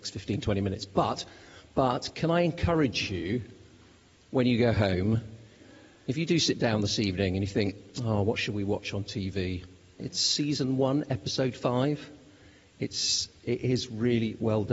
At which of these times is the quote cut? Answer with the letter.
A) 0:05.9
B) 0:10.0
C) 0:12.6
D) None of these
B